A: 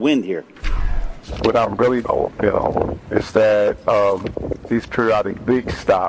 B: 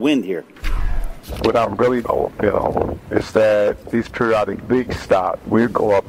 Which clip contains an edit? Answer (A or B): B